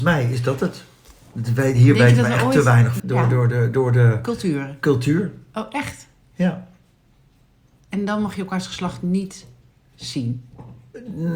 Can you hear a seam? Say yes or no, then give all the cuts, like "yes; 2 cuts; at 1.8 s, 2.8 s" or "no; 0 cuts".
yes; 1 cut; at 3.0 s